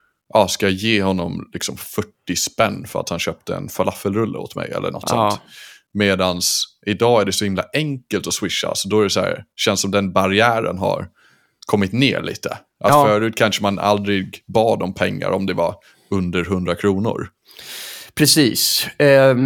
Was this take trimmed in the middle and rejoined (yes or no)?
no